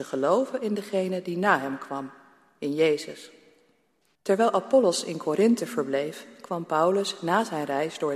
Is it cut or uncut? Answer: cut